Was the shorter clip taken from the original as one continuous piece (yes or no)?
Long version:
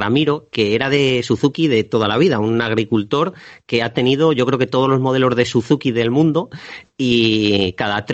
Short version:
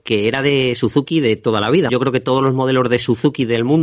no